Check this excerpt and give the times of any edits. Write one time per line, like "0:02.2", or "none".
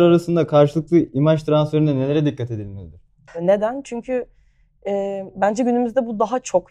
0:03.3